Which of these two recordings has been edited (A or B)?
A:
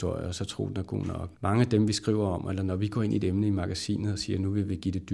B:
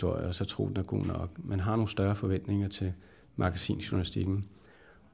A